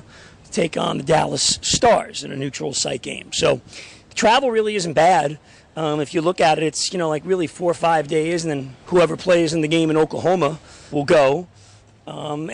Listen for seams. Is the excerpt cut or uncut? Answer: cut